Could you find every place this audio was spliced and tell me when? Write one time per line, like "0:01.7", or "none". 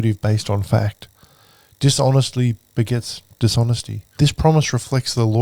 0:04.1